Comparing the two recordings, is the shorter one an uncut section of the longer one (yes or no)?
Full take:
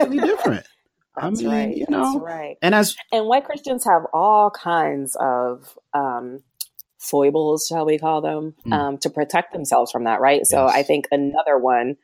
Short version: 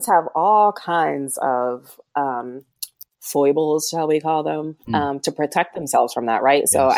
yes